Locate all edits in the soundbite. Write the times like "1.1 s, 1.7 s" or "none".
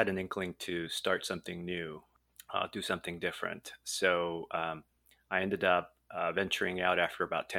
none